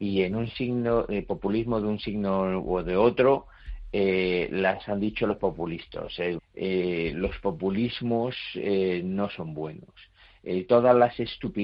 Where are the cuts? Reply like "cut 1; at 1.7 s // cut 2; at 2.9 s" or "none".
cut 1; at 6.4 s